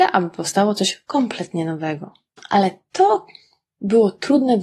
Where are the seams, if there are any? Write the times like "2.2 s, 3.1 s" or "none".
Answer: 2.4 s